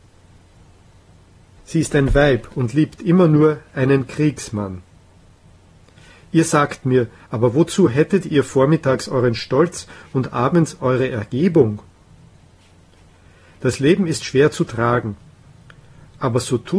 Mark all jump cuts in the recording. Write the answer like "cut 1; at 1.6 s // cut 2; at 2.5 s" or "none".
cut 1; at 1.6 s // cut 2; at 7.2 s